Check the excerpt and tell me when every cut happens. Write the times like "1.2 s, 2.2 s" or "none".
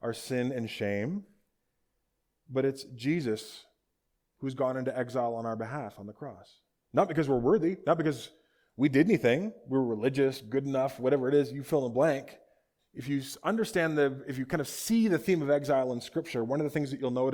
6.8 s, 12.8 s